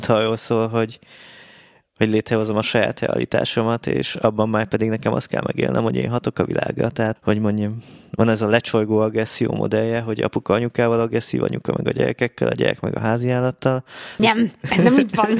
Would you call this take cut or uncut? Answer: cut